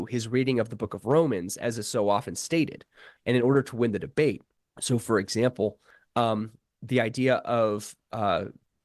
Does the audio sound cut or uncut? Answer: cut